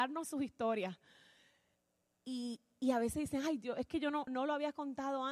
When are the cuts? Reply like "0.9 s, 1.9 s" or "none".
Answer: 4.3 s